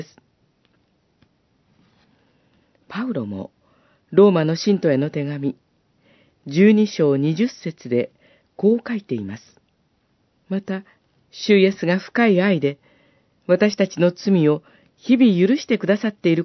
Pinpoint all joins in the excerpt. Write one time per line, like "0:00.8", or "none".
0:10.3